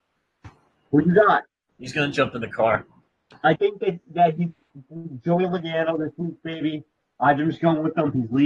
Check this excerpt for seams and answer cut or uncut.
cut